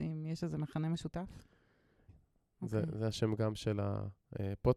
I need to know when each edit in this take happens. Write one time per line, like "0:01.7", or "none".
0:02.1